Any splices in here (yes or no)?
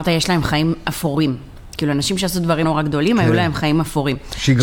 yes